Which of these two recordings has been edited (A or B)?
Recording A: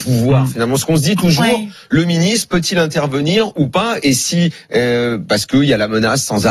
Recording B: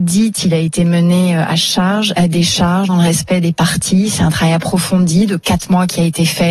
B